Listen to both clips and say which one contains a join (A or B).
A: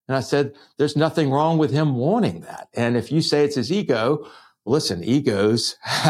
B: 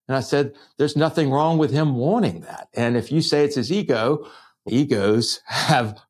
B